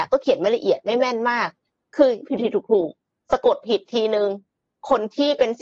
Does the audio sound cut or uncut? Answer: uncut